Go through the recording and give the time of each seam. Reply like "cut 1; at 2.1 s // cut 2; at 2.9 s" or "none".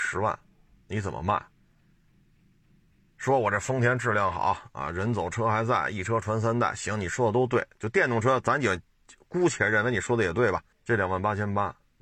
cut 1; at 10.7 s